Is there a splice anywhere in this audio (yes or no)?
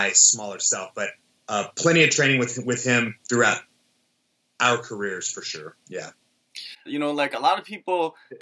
yes